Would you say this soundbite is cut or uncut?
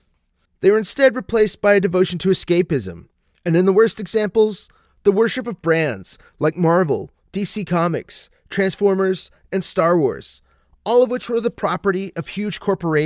uncut